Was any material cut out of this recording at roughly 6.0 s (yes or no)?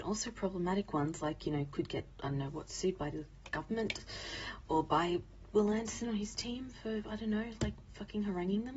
yes